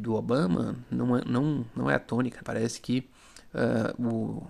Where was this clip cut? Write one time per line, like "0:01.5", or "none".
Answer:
0:02.4